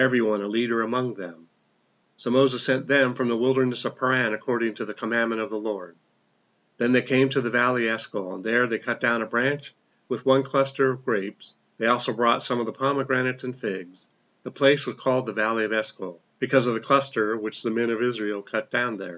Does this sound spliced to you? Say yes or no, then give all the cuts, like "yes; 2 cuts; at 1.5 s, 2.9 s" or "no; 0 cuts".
yes; 2 cuts; at 11.7 s, 16.3 s